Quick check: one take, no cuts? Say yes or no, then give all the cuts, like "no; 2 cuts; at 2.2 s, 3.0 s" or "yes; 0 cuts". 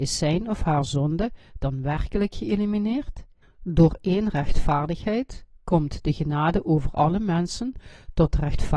no; 1 cut; at 3.4 s